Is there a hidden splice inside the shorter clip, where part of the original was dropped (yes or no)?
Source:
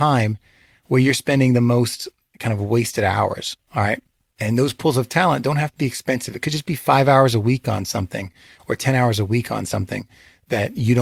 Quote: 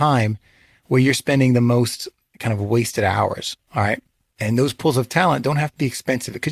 no